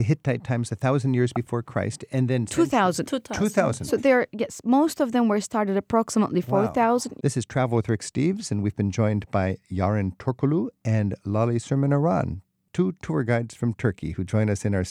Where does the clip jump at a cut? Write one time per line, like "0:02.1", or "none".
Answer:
0:07.2